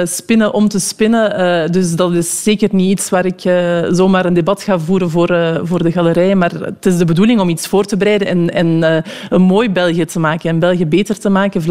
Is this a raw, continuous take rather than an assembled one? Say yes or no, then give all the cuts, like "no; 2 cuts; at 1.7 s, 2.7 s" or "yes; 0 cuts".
yes; 0 cuts